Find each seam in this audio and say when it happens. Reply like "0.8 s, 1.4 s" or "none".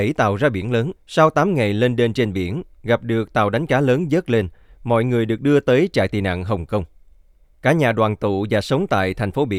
1.0 s, 7.4 s